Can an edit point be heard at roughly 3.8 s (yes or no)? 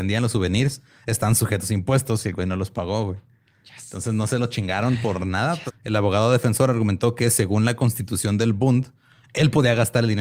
no